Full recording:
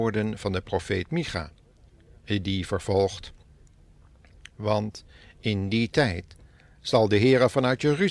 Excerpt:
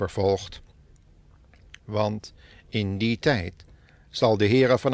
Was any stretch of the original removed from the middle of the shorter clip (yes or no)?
no